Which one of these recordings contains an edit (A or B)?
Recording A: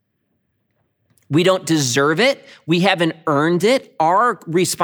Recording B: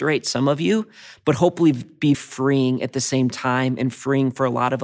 B